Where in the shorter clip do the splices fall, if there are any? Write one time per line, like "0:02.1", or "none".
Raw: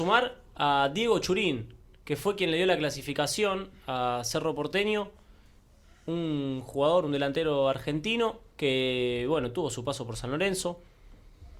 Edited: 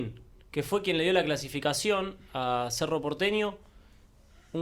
none